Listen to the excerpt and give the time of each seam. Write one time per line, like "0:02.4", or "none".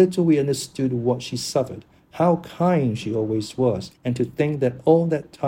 0:03.9